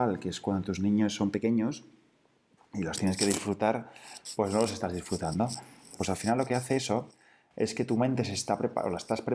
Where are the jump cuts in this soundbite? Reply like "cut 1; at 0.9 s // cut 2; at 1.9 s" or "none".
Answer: cut 1; at 5.9 s